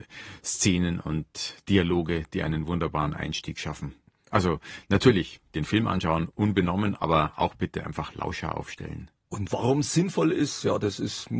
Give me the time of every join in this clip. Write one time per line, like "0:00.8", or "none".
none

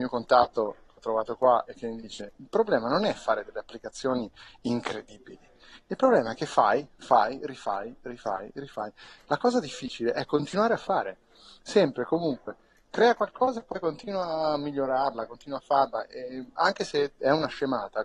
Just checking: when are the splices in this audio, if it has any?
none

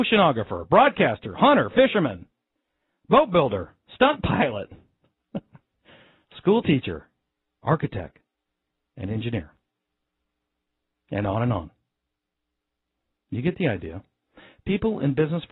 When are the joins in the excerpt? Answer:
none

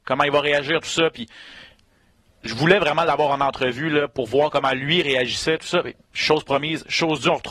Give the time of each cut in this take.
none

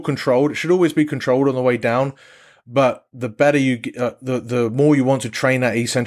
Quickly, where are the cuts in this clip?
none

